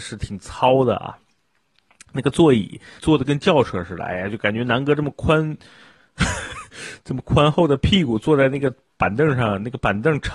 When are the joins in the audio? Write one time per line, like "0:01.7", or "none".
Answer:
0:03.0